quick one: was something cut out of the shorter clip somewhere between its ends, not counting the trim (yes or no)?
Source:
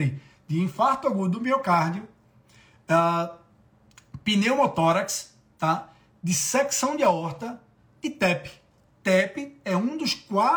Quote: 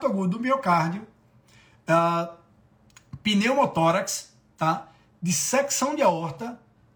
no